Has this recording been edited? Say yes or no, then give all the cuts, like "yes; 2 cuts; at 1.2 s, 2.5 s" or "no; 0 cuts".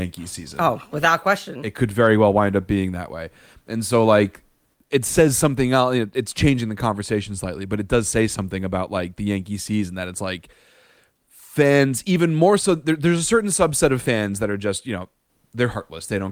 no; 0 cuts